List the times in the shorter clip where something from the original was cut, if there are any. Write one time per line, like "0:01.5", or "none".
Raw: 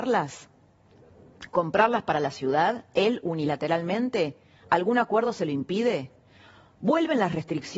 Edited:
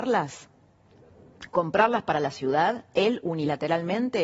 none